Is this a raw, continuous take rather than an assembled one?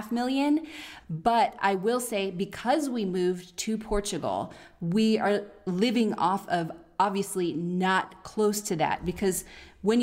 no; 1 cut; at 1.0 s

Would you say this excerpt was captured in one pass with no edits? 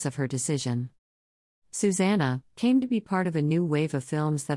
no; 1 cut; at 2.5 s

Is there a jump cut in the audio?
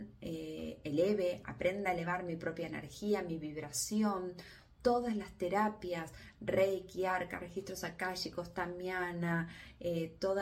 no; 0 cuts

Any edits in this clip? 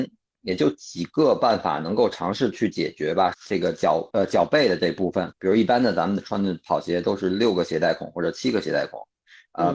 yes; 2 cuts; at 3.3 s, 5.3 s

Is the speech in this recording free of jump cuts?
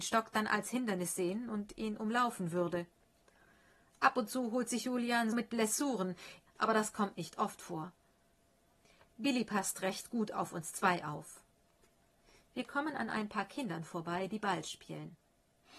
no; 2 cuts; at 5.3 s, 6.5 s

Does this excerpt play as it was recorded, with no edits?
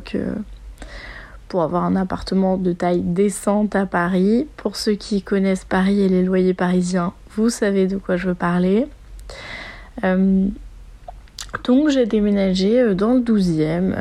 yes; 0 cuts

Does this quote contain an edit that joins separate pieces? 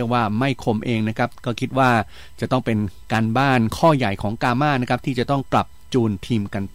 yes; 1 cut; at 5.5 s

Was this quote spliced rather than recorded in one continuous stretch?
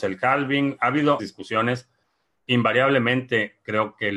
yes; 1 cut; at 1.2 s

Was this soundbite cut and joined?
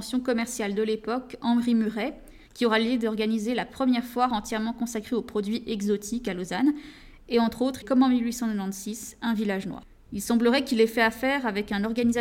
yes; 1 cut; at 7.8 s

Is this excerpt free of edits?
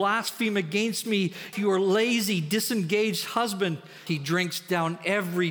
no; 2 cuts; at 1.5 s, 4.1 s

